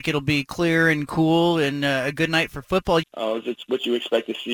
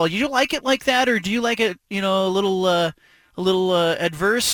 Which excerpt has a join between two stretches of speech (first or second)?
first